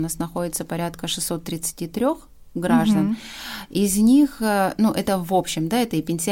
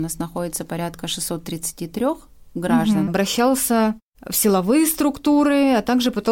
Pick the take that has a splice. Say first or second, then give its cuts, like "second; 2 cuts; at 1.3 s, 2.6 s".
second; 1 cut; at 3.1 s